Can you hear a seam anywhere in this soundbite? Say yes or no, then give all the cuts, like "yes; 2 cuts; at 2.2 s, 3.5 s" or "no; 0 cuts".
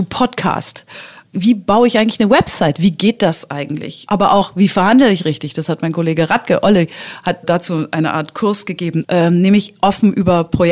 yes; 1 cut; at 9.0 s